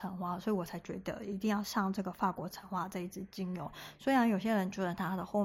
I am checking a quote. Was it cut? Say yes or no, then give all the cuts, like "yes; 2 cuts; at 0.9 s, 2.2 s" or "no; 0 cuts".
no; 0 cuts